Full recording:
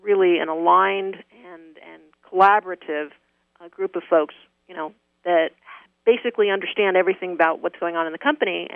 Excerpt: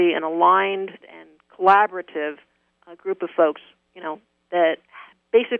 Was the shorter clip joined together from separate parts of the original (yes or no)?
yes